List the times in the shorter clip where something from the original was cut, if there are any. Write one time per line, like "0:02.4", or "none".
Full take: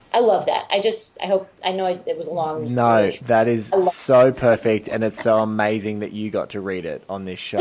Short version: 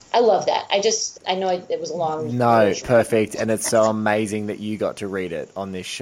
0:01.2
0:02.8